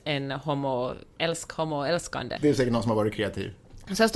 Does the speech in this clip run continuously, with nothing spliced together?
no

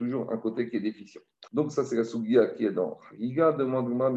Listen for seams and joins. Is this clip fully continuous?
no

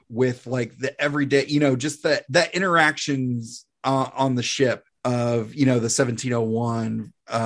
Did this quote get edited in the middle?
no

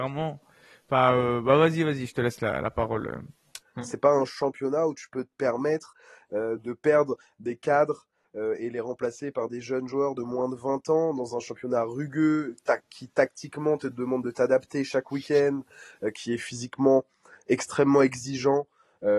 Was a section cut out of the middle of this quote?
yes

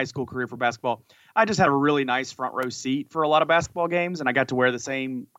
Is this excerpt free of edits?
yes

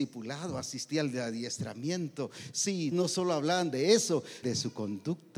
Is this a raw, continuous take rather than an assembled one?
no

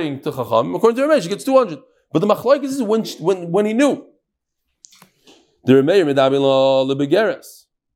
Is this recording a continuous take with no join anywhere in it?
yes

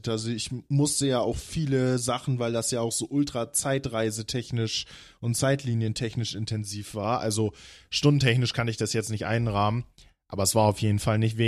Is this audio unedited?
yes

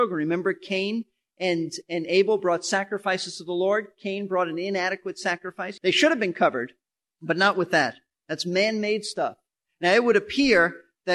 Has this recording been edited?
yes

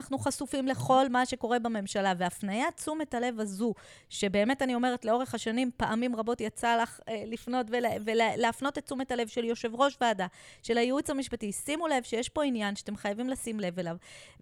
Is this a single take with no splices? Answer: yes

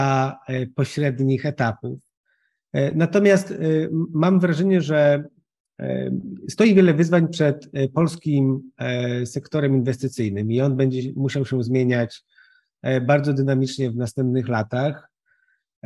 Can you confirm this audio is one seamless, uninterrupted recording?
yes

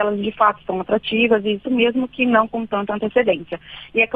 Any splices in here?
yes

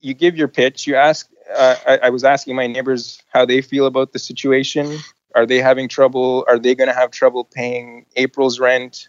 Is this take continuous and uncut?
no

